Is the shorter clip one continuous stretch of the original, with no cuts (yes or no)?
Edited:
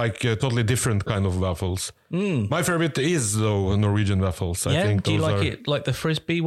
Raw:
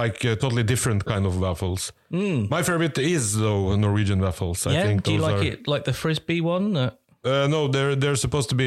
yes